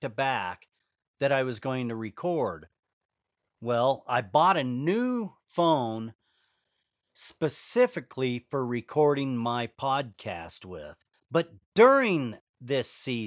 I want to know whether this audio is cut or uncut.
cut